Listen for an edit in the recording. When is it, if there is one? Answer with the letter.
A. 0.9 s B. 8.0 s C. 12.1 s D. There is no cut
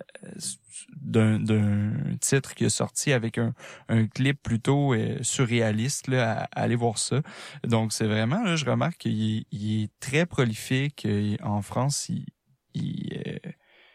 D